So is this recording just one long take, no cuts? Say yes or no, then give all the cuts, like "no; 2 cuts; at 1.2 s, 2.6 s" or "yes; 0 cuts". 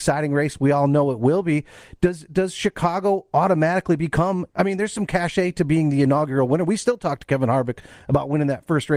no; 1 cut; at 4.5 s